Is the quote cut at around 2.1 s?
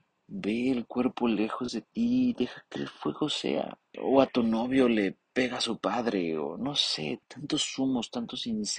no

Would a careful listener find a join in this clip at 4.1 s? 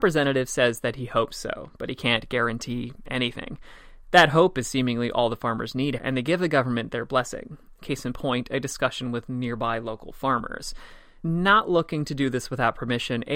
no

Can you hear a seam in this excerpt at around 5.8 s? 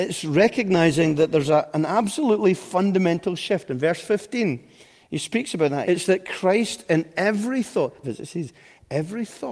yes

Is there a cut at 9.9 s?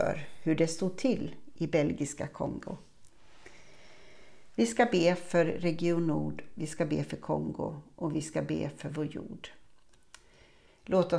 no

